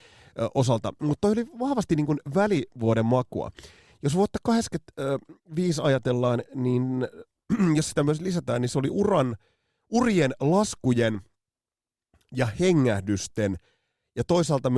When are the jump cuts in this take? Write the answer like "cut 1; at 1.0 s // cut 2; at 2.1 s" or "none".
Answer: none